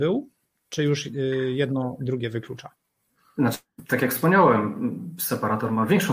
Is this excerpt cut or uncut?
uncut